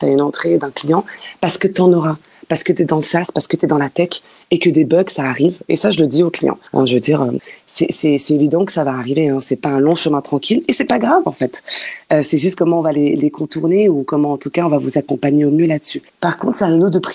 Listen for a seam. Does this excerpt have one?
no; 0 cuts

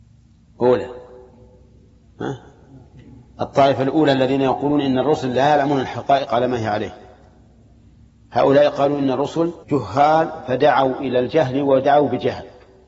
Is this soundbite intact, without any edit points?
no; 1 cut; at 9.6 s

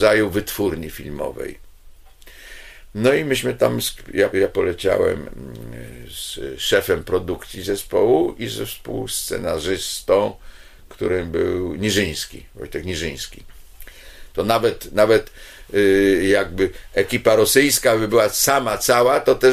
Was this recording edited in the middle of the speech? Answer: yes; 2 cuts; at 4.3 s, 14.3 s

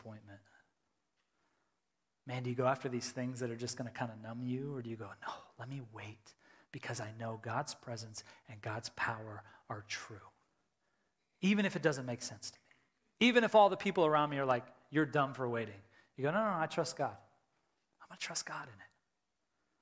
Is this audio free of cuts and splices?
yes; 0 cuts

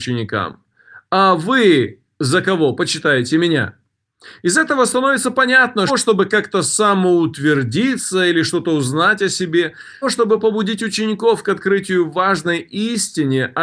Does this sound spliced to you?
yes; 2 cuts; at 5.9 s, 10.0 s

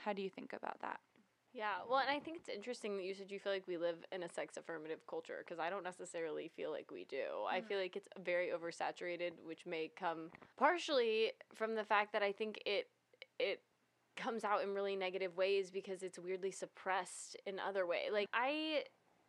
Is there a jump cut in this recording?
yes; 1 cut; at 10.5 s

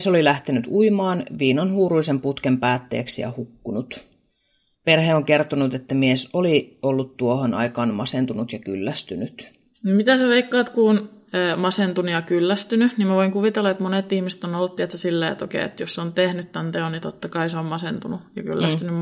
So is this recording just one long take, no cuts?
yes; 0 cuts

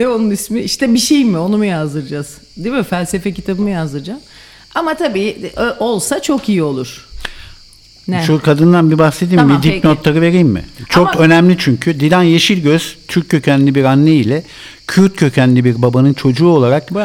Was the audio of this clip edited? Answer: no; 0 cuts

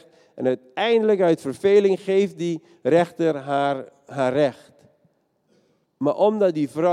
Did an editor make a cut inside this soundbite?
yes; 1 cut; at 5.8 s

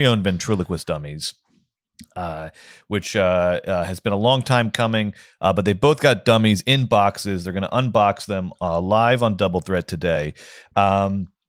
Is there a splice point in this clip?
no; 0 cuts

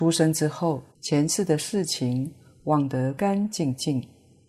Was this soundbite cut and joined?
yes; 2 cuts; at 0.9 s, 3.2 s

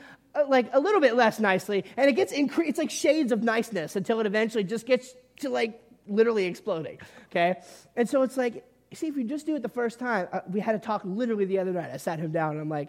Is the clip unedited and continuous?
yes; 0 cuts

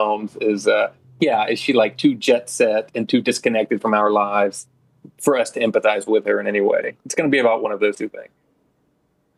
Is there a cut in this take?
no; 0 cuts

